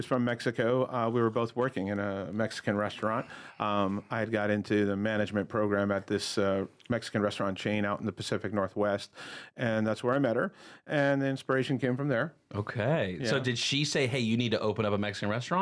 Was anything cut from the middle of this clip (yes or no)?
no